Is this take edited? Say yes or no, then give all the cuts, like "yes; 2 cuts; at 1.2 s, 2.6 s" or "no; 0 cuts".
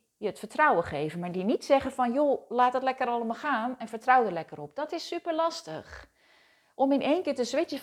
no; 0 cuts